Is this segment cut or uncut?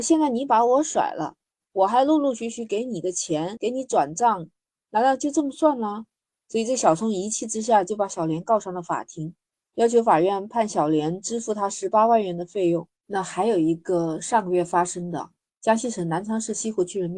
cut